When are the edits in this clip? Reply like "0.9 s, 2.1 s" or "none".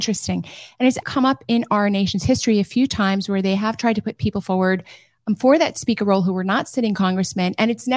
1.0 s